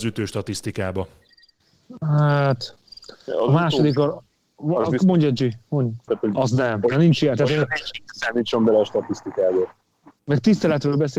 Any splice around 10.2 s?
no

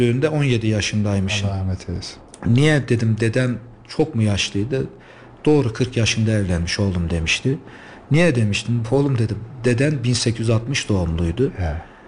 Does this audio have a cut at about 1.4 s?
no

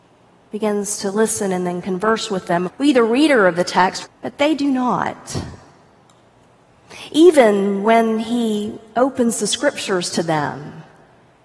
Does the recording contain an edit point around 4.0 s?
yes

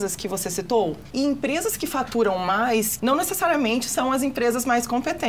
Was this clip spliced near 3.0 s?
yes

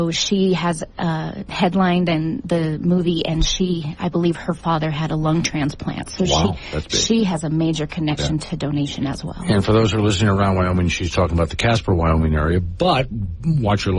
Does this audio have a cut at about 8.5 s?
no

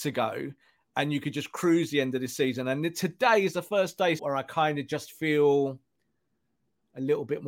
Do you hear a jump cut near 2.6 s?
no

